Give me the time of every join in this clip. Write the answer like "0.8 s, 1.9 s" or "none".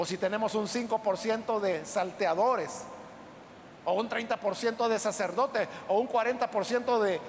none